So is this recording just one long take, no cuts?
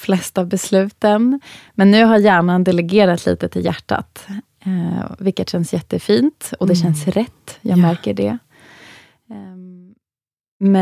yes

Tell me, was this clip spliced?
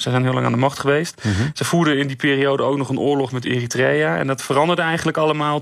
no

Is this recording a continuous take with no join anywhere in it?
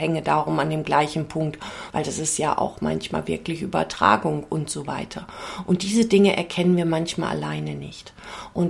no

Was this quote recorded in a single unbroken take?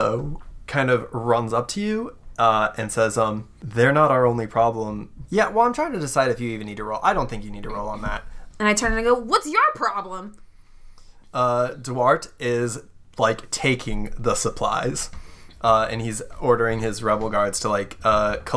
no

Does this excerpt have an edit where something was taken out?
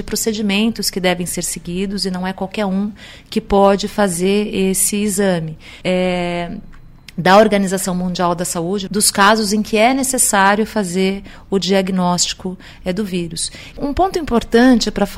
yes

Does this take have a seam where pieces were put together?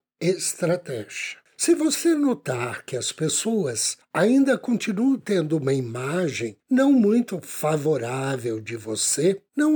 no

